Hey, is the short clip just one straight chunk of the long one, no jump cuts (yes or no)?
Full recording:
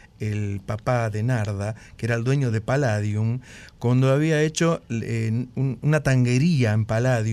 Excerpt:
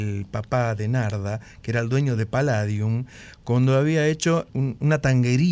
no